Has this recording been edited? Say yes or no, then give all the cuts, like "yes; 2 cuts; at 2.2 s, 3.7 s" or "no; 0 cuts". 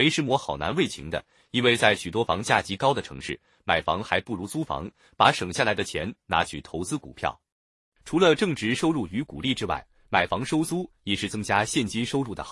no; 0 cuts